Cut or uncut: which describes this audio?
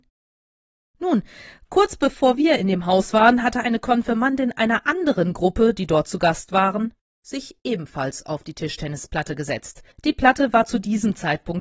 cut